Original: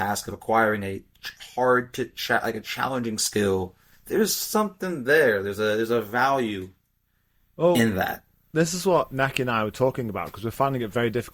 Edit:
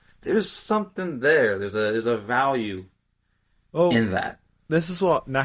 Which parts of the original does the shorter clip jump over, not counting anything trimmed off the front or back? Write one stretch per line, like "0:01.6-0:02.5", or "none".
none